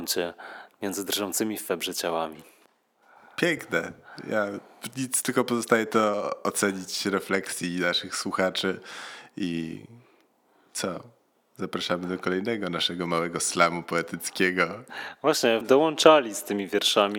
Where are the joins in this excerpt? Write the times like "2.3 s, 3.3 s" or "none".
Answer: 15.6 s